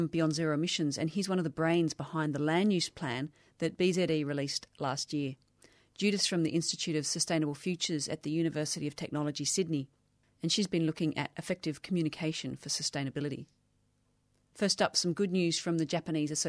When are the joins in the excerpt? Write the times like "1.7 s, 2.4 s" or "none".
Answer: none